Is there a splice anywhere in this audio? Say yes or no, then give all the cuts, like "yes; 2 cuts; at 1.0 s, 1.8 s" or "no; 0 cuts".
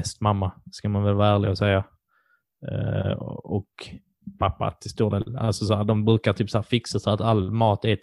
no; 0 cuts